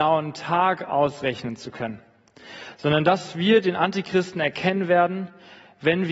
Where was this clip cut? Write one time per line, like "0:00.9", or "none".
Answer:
none